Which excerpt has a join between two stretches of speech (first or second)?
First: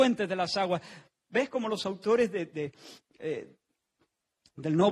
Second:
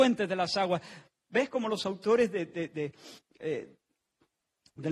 first